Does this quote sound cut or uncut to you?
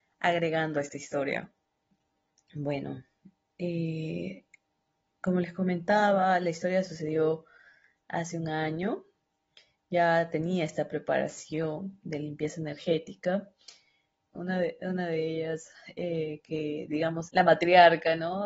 cut